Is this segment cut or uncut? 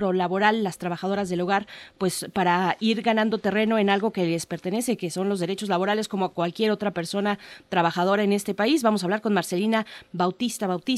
uncut